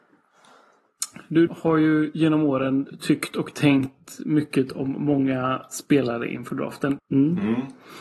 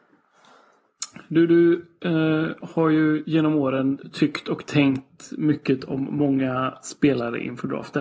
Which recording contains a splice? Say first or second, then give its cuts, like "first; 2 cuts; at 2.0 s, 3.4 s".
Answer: first; 2 cuts; at 1.5 s, 7.0 s